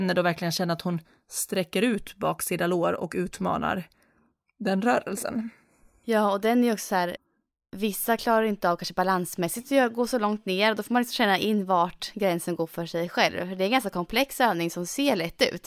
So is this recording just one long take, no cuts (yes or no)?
yes